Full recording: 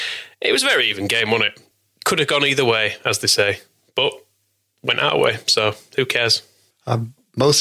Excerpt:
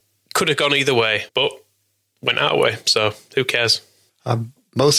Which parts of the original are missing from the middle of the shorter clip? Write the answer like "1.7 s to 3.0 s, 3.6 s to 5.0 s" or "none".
3.0 s to 3.9 s